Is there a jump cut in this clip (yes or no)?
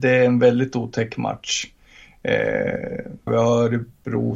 yes